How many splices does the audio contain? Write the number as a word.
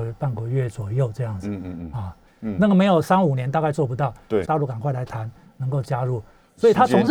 two